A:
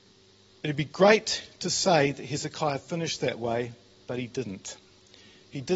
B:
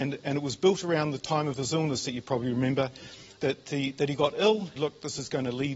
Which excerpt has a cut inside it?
B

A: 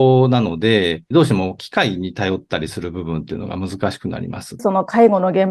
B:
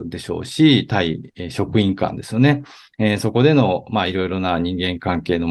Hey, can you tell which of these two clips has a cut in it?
A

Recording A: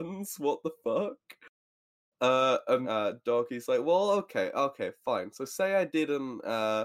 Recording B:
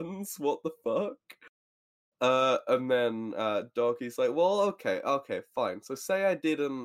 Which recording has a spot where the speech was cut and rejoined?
A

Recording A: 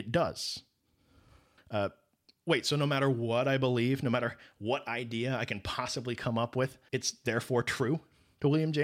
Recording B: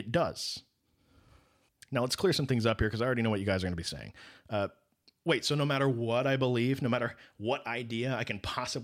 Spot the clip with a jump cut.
A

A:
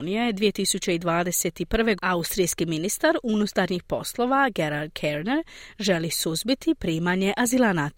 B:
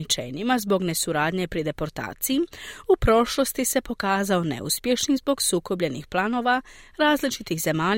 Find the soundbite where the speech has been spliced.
A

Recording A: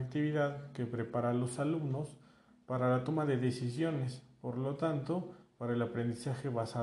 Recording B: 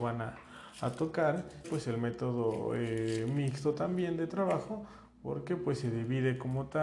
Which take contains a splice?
B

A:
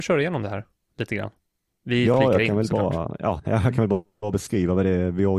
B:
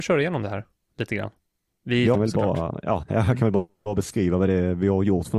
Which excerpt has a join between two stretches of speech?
B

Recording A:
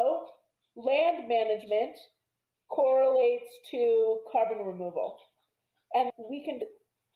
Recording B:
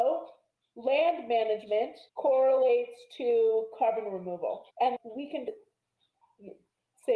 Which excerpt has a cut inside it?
B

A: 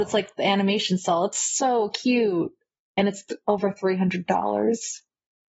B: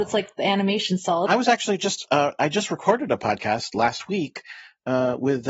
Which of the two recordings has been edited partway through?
B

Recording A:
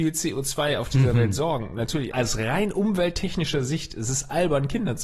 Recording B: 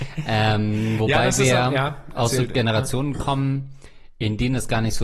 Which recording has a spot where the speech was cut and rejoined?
A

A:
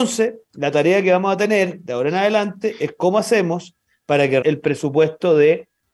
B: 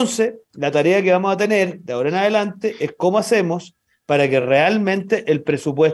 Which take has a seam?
A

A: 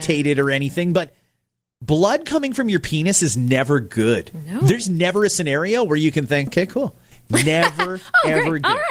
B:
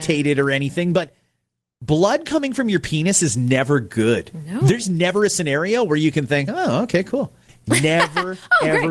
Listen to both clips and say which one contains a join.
A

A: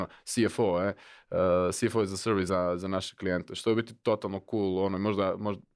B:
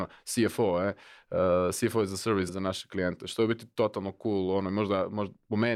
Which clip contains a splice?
B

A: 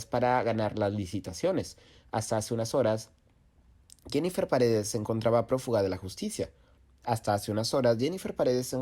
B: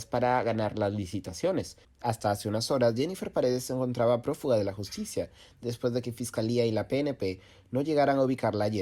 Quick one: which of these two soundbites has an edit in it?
B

